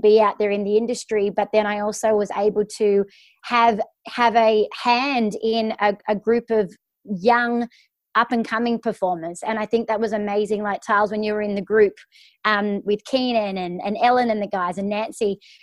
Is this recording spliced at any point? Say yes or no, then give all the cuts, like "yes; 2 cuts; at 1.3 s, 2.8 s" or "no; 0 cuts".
no; 0 cuts